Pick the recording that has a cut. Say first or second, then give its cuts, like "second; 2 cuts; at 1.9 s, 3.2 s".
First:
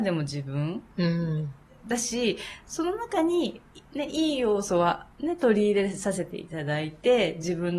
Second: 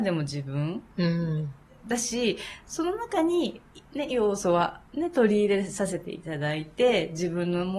second; 1 cut; at 4.1 s